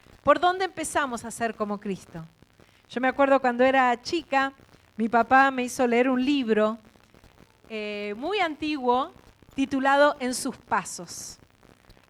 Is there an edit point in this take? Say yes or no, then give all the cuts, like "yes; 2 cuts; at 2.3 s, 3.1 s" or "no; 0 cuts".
no; 0 cuts